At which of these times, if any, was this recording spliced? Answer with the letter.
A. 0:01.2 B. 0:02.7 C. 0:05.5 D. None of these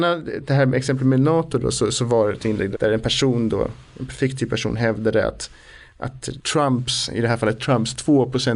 B